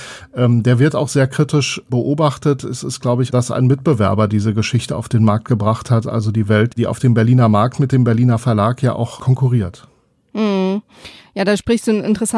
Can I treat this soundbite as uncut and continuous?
no; 2 cuts; at 3.3 s, 6.7 s

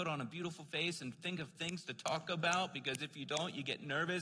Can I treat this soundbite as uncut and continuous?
yes; 0 cuts

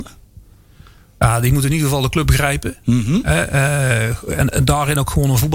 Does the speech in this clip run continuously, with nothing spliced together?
no; 1 cut; at 4.5 s

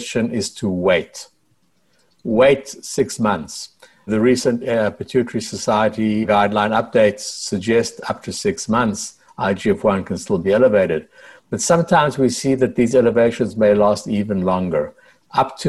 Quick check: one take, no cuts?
yes; 0 cuts

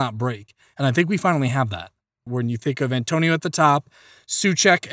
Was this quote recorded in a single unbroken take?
no; 1 cut; at 2.3 s

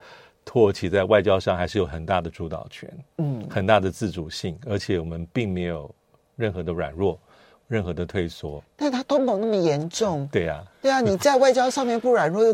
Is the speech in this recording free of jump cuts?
yes; 0 cuts

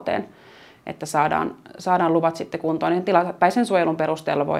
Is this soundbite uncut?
yes; 0 cuts

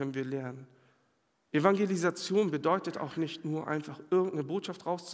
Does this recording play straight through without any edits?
yes; 0 cuts

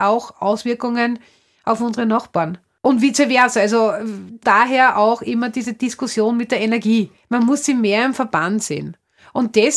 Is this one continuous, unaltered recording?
yes; 0 cuts

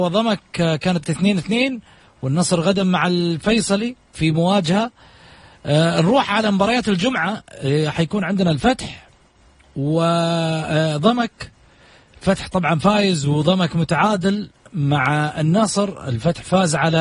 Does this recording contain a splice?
no; 0 cuts

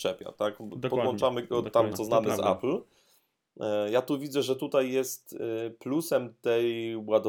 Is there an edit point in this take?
yes; 1 cut; at 1.9 s

